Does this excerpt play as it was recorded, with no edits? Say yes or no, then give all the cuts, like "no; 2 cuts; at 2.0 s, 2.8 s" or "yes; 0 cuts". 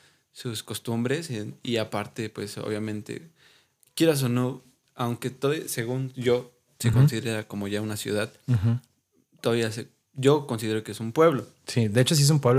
yes; 0 cuts